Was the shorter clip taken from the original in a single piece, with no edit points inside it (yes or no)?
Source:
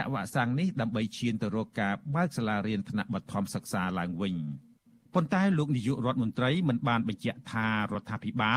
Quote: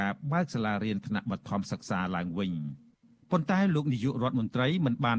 yes